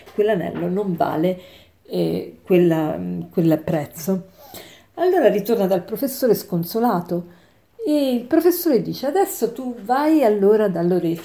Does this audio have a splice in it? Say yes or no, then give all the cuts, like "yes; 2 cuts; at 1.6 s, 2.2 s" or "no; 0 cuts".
no; 0 cuts